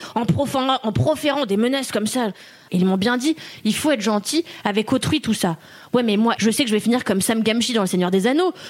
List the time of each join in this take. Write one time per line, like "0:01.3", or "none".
0:02.7
0:06.4